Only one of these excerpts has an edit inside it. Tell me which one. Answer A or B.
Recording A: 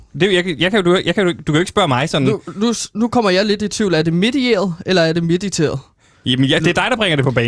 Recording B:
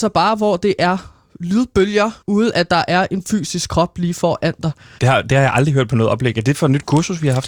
B